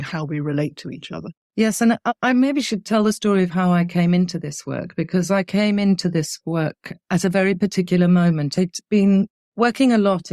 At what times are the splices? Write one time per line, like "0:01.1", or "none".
0:01.4

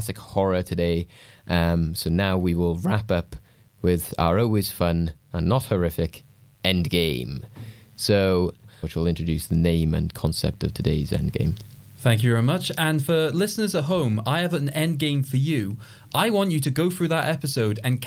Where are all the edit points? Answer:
0:08.8

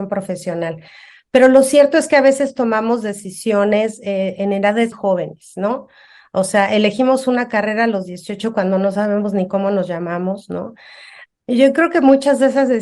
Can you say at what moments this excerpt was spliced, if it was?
0:04.9
0:11.3

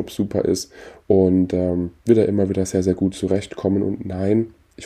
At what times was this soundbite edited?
0:02.0

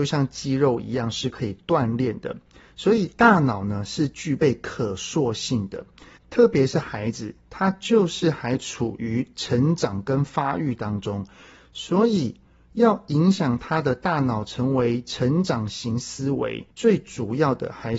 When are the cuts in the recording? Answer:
0:06.2
0:16.7

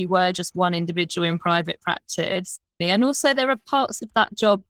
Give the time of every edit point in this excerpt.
0:02.8

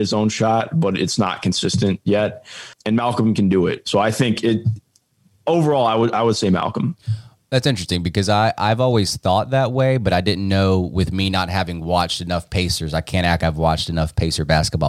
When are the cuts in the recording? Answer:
0:13.4

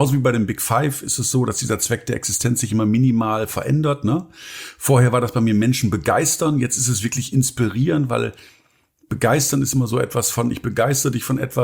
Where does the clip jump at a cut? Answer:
none

